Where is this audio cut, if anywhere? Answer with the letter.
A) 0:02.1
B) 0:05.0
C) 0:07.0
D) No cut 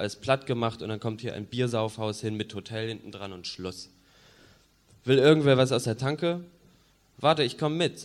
D